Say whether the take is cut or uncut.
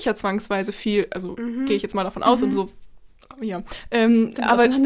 uncut